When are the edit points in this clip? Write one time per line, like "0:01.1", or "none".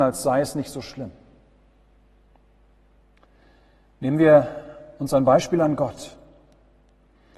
none